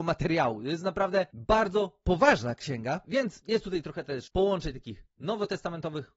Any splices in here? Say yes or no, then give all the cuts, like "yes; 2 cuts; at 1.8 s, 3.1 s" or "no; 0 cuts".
yes; 1 cut; at 3.0 s